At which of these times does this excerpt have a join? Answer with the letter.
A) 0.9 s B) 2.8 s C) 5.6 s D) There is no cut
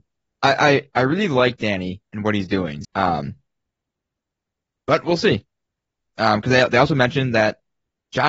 B